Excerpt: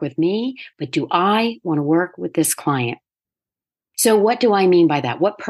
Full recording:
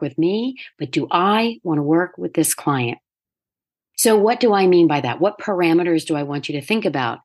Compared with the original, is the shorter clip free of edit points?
yes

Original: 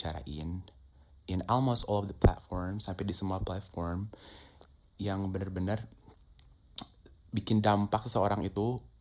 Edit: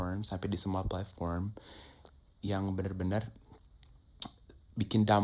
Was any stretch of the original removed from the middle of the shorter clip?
no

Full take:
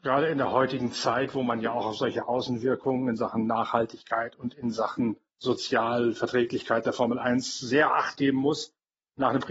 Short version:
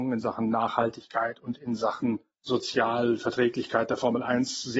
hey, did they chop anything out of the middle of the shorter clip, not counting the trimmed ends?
no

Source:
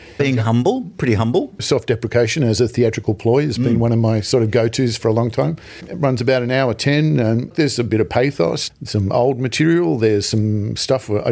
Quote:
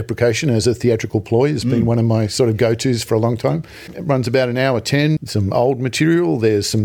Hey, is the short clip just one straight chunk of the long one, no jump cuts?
no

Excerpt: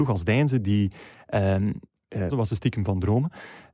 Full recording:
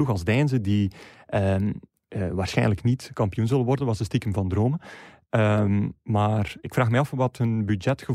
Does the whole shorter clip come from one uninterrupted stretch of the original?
no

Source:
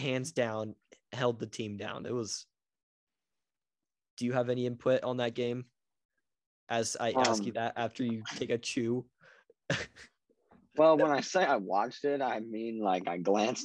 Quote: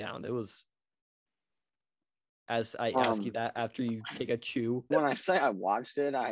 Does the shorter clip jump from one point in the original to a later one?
yes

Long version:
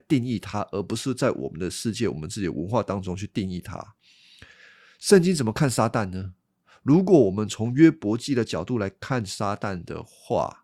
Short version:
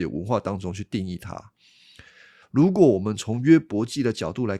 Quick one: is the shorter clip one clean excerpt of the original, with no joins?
no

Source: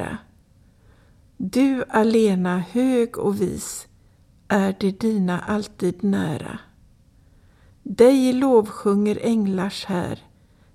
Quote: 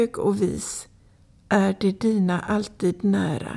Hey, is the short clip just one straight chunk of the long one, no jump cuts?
yes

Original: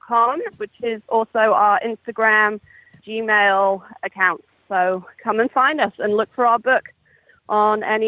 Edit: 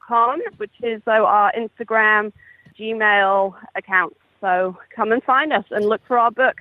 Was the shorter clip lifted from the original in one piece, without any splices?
no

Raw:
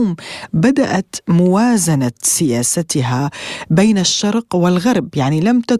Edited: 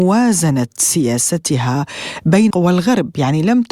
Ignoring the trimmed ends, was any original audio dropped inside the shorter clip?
yes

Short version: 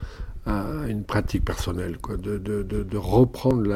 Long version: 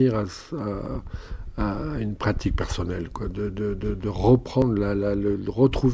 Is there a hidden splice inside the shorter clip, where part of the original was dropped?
no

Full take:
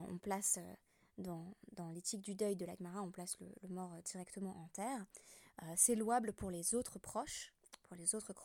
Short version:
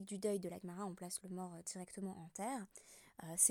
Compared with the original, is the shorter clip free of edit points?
no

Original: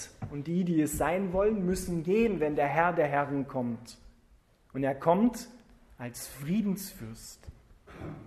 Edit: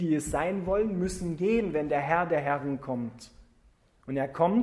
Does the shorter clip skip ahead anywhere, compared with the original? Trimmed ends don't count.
no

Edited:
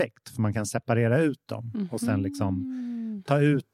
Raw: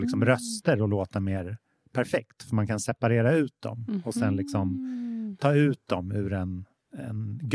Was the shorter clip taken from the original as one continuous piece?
yes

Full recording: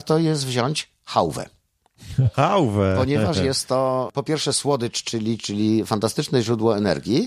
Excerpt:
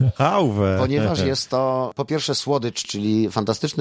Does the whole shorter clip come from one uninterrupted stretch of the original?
no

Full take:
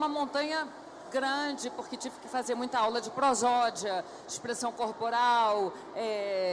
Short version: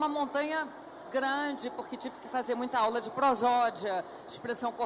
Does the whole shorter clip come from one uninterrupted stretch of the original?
yes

